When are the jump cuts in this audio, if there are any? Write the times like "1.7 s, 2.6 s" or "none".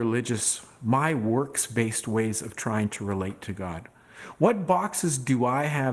none